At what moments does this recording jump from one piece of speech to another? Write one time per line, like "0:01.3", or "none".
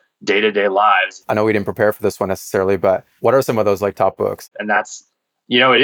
0:01.2
0:04.5